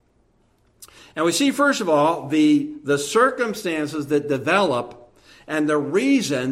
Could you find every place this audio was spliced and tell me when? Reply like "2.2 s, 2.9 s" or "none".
none

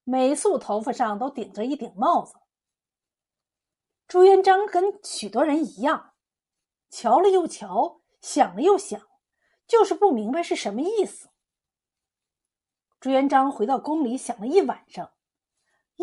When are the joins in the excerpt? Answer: none

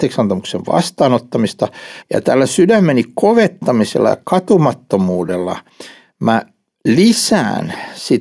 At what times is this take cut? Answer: 2.0 s

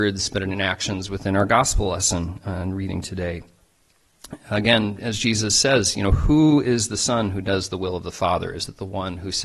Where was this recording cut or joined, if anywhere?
none

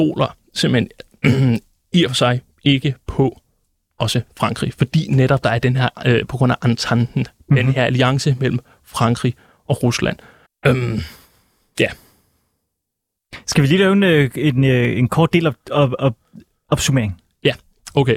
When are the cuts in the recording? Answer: 10.5 s

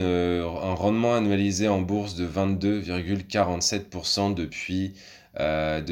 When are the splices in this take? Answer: none

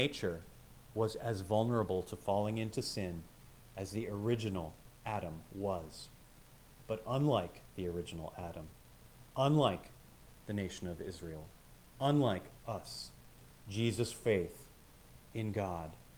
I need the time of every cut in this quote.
none

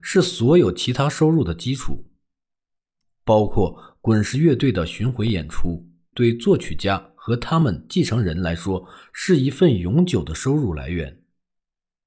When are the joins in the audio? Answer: 6.1 s

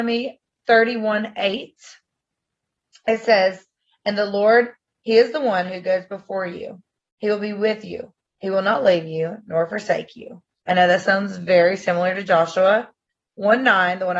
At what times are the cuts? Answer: 10.6 s

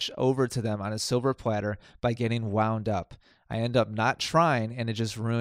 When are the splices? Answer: none

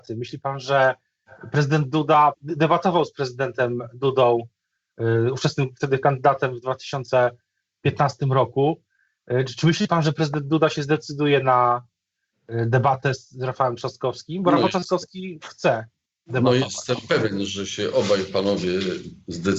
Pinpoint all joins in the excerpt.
2.3 s

